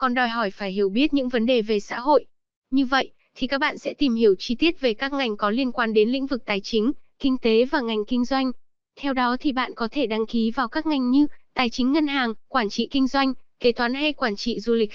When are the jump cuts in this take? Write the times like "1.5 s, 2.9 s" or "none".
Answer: none